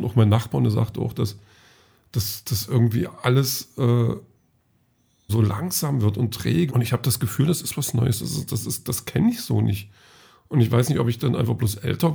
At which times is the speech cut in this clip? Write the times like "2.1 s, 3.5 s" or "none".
5.3 s, 6.7 s